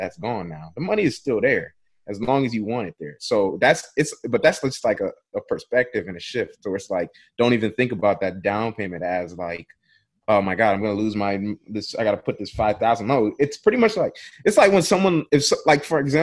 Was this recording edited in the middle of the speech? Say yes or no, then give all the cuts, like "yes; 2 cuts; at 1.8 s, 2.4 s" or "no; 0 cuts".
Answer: no; 0 cuts